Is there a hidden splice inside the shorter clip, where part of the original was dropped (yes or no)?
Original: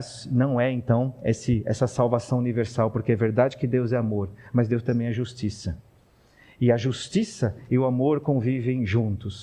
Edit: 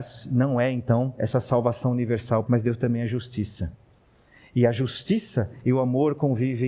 yes